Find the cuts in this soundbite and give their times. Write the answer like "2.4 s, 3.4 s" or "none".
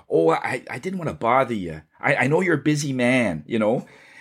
none